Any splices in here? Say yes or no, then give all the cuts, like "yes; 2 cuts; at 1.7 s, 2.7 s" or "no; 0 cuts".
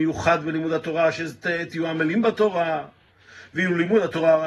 no; 0 cuts